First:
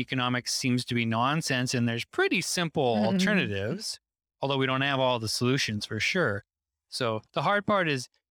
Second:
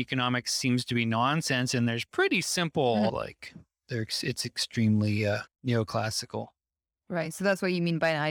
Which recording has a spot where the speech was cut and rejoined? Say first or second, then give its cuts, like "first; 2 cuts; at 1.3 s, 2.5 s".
second; 2 cuts; at 3.1 s, 5.5 s